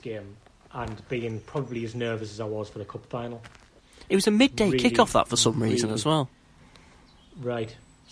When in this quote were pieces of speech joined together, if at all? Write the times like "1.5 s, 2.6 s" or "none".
none